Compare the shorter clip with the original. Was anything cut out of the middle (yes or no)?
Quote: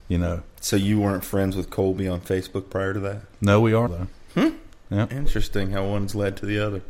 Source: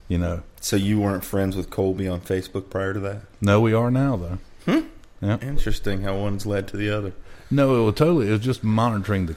yes